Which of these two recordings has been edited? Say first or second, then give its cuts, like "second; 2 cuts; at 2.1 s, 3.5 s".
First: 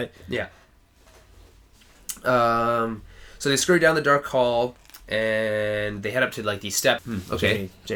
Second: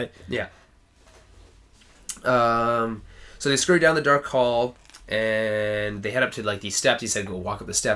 first; 1 cut; at 7.0 s